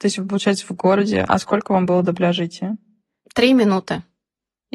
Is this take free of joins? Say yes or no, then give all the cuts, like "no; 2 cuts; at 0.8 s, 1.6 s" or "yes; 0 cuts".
yes; 0 cuts